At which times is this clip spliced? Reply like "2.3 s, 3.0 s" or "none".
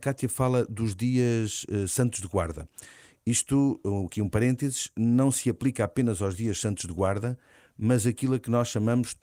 none